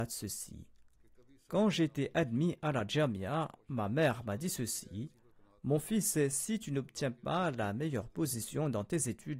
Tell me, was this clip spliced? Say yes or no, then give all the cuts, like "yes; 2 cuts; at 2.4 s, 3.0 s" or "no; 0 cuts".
no; 0 cuts